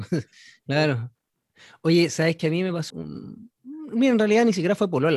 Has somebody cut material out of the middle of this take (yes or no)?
yes